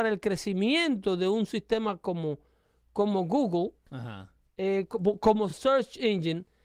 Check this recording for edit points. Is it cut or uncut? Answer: uncut